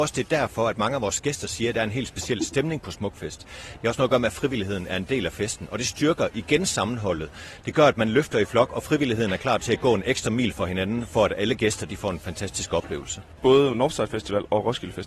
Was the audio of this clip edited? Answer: no; 0 cuts

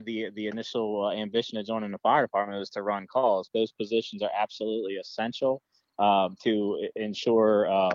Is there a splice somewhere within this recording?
yes; 1 cut; at 3.5 s

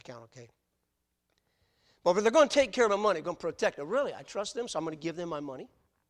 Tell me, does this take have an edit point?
no; 0 cuts

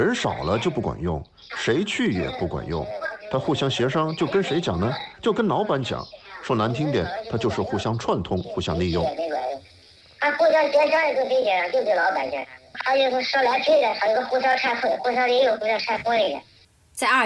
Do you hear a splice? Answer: no; 0 cuts

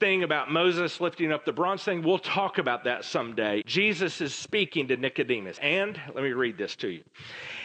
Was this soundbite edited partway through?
yes; 2 cuts; at 3.6 s, 5.6 s

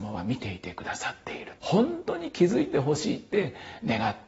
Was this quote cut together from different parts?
yes; 1 cut; at 1.6 s

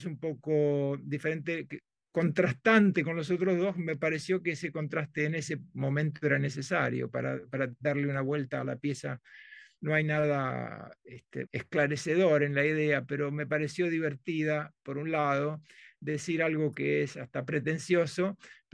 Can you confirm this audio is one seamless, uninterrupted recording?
no; 2 cuts; at 9.8 s, 11.5 s

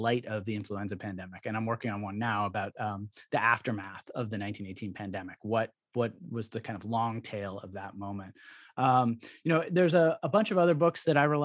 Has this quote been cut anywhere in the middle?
no; 0 cuts

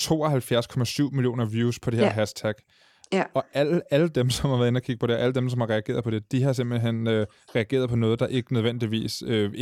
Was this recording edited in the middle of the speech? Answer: no; 0 cuts

